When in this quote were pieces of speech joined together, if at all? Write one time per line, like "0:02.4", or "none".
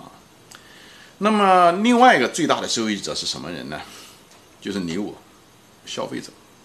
none